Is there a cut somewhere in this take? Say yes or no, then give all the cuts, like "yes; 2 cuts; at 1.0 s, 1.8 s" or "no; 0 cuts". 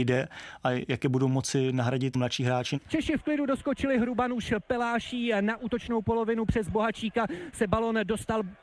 no; 0 cuts